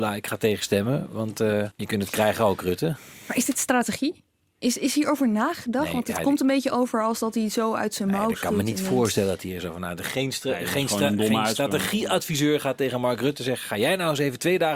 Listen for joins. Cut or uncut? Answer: uncut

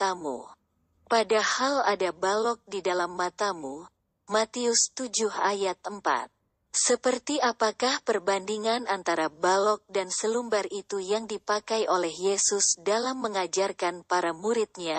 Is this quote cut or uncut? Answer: uncut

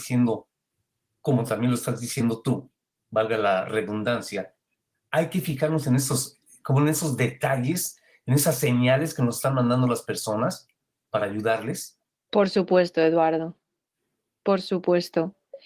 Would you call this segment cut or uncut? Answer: uncut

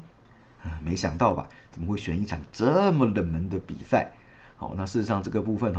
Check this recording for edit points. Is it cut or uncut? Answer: uncut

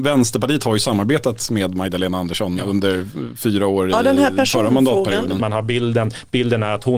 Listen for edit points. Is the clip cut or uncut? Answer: cut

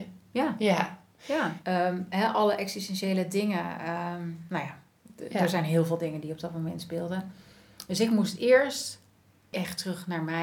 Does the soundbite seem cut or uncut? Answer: cut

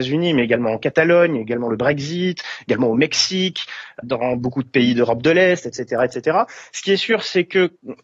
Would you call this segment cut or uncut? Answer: cut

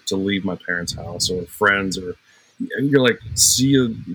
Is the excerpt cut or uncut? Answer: uncut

